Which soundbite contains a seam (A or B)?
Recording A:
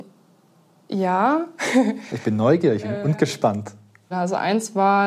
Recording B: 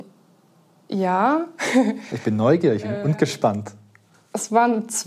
A